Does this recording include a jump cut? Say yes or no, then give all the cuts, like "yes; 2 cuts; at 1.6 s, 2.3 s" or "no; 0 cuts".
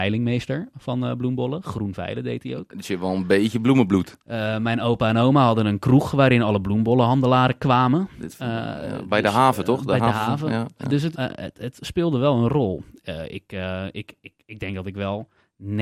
yes; 1 cut; at 11.1 s